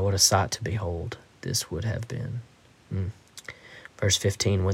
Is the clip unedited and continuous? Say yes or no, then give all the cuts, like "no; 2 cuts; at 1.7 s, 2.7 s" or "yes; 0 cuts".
no; 1 cut; at 2.8 s